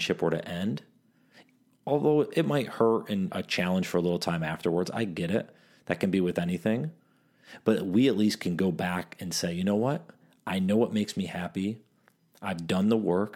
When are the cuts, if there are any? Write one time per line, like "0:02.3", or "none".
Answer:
0:03.3